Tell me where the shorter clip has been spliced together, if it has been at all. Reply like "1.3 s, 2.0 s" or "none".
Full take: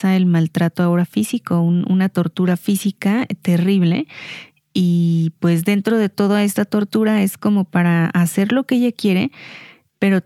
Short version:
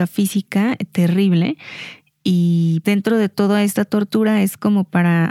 2.8 s